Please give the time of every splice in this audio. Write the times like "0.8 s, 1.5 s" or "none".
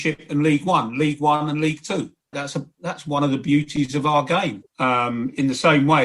2.3 s, 4.7 s